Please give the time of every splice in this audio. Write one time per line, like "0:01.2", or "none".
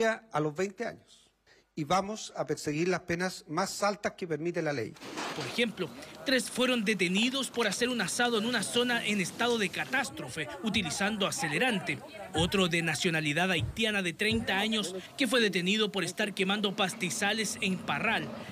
0:05.3